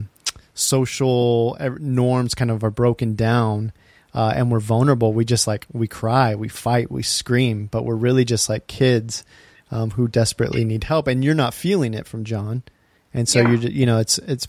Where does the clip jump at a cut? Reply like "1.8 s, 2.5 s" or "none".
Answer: none

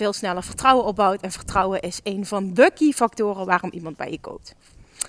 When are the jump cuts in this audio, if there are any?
none

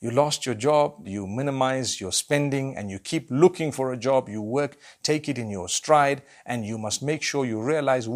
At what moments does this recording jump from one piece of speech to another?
1.0 s

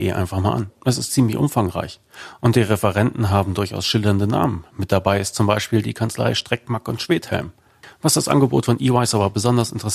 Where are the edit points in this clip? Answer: none

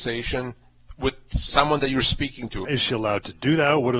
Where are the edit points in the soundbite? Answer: 2.6 s

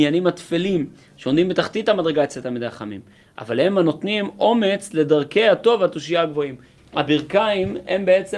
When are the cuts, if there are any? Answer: 6.8 s

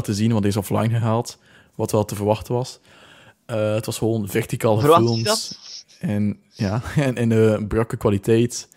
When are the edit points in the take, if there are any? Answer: none

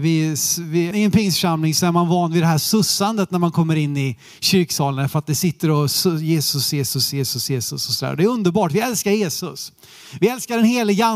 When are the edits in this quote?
0.9 s

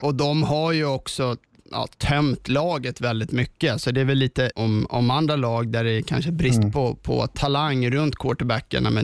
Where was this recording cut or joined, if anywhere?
4.5 s

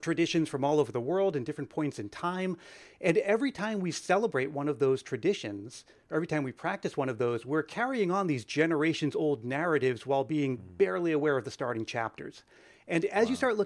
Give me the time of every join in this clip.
none

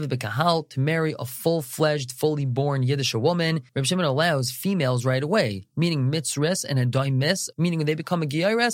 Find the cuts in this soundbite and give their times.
3.7 s, 7.5 s

